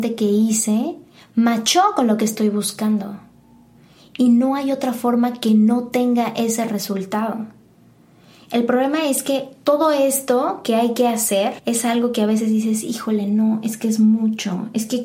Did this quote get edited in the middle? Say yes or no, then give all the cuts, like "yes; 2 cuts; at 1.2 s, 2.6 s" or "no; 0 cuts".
no; 0 cuts